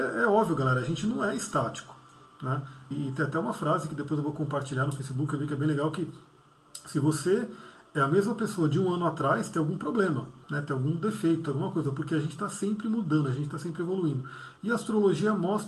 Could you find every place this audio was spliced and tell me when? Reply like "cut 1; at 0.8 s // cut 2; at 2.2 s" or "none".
cut 1; at 2.9 s // cut 2; at 10.4 s